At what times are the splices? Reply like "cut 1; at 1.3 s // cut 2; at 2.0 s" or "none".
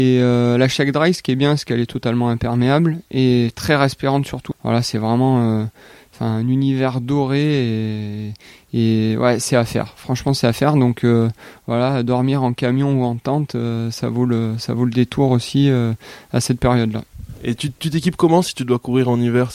cut 1; at 4.5 s